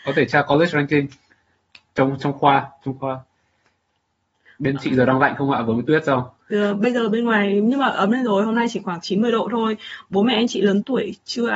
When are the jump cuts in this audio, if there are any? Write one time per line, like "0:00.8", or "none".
none